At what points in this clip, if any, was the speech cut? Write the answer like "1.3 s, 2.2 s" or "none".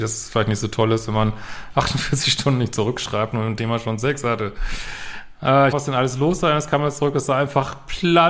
5.7 s